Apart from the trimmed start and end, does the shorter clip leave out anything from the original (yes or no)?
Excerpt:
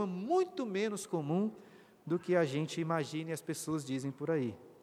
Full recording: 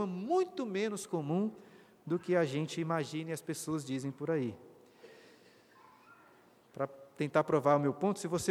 no